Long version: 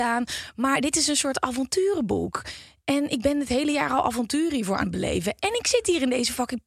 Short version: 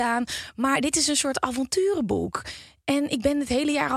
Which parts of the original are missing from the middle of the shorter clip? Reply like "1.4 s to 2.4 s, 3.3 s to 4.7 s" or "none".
none